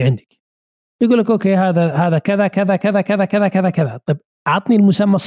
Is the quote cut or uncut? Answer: uncut